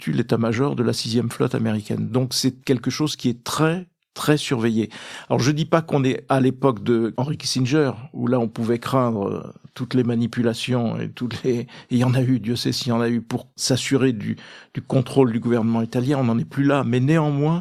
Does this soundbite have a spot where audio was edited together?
no; 0 cuts

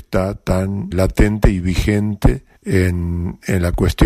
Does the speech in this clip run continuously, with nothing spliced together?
no; 2 cuts; at 0.9 s, 2.6 s

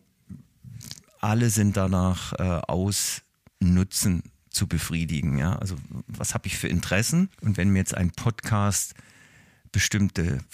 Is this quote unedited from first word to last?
no; 1 cut; at 7.3 s

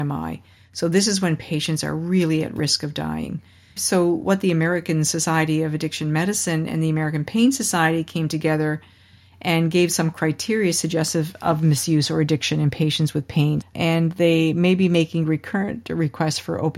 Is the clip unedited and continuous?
no; 2 cuts; at 3.8 s, 13.6 s

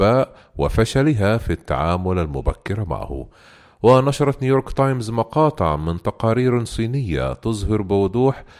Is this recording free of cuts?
yes; 0 cuts

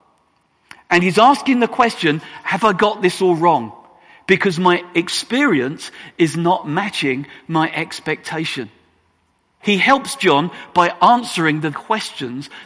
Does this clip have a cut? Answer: yes; 2 cuts; at 9.6 s, 11.7 s

